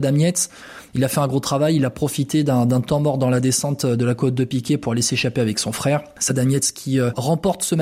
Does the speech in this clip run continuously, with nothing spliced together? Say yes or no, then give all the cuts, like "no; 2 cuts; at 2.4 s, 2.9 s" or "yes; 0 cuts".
yes; 0 cuts